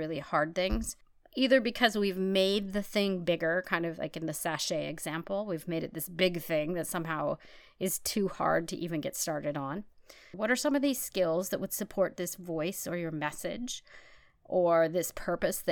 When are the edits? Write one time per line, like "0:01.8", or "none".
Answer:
0:10.3